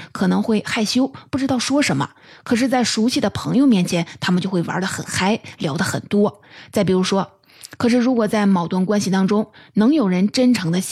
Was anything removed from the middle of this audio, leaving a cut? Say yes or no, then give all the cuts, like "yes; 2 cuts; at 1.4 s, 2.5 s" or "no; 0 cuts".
yes; 1 cut; at 7.8 s